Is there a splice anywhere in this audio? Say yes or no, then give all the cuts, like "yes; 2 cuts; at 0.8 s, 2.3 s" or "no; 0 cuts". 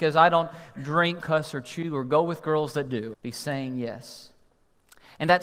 yes; 2 cuts; at 1.2 s, 3.1 s